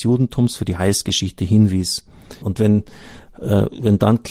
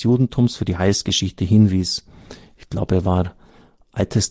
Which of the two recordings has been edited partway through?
first; 1 cut; at 2.4 s

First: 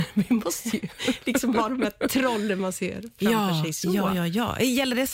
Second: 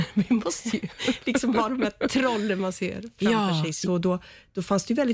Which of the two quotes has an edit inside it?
second; 1 cut; at 3.9 s

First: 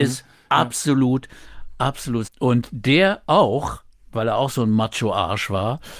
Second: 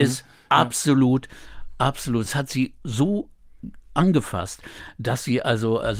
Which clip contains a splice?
first; 1 cut; at 2.2 s

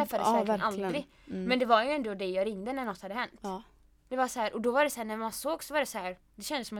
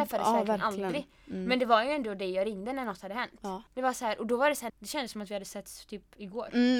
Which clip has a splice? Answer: second; 2 cuts; at 3.7 s, 4.7 s

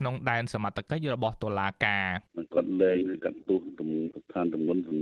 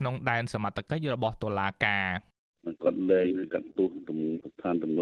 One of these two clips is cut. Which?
first; 1 cut; at 2.3 s

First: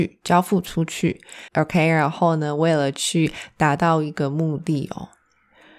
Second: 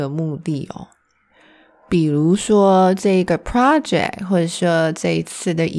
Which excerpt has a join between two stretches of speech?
first; 1 cut; at 1.5 s

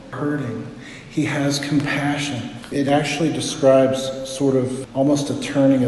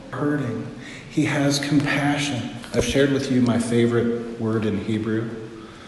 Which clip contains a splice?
first; 1 cut; at 2.7 s

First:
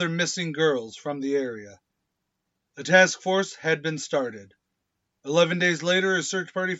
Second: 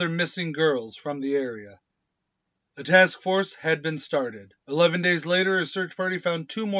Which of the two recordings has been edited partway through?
second; 1 cut; at 4.6 s

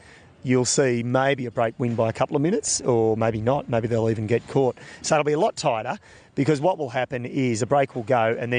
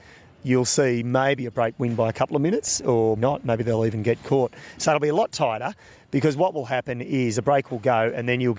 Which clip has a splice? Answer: second; 1 cut; at 3.2 s

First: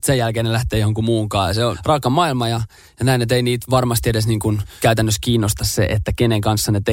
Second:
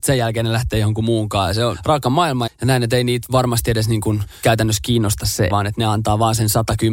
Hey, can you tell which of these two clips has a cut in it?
second; 2 cuts; at 2.5 s, 5.5 s

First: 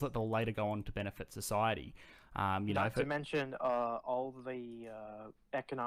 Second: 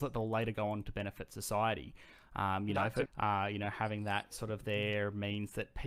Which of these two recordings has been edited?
second; 1 cut; at 3.1 s

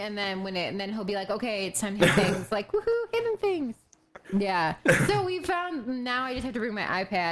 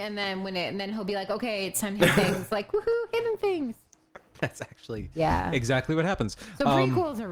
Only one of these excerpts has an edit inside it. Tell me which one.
first; 1 cut; at 4.2 s

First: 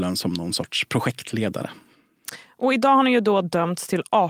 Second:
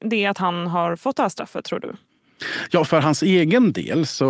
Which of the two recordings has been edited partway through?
second; 1 cut; at 2.9 s

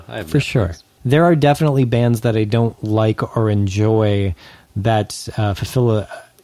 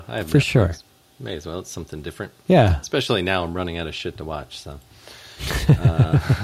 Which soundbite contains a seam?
first; 1 cut; at 1.0 s

